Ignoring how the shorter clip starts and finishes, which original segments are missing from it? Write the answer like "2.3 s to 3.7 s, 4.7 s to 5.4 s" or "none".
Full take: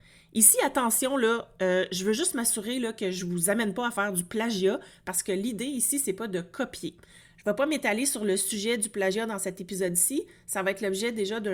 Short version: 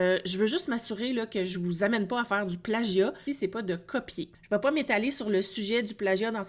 4.9 s to 5.9 s, 7.0 s to 7.3 s